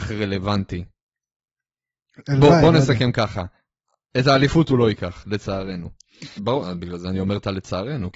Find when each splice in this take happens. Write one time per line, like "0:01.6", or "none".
0:06.4